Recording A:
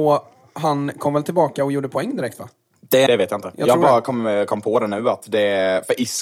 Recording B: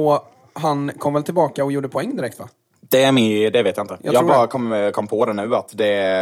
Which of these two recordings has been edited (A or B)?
A